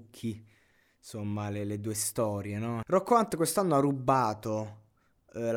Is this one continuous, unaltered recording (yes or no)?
no